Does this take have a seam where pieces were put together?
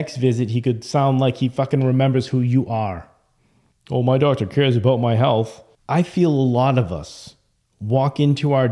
yes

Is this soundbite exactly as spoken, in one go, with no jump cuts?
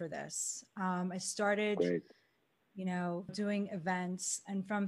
no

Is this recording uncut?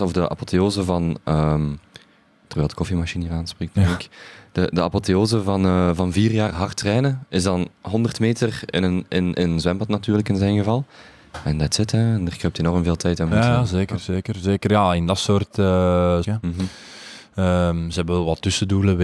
no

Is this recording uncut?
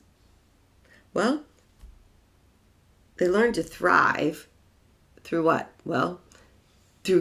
yes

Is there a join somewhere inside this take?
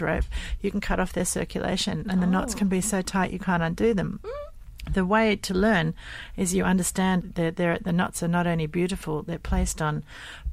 yes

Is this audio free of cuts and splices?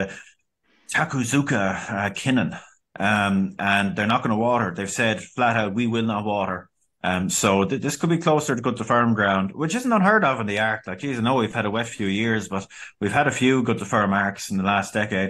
no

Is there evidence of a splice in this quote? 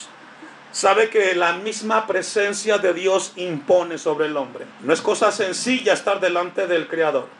yes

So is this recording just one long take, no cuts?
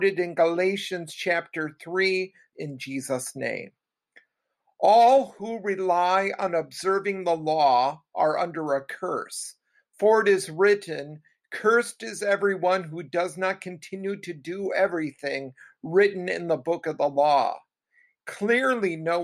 no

